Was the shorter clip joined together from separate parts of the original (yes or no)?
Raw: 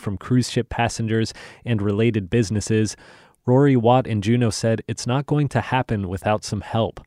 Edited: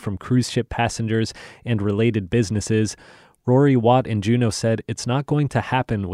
no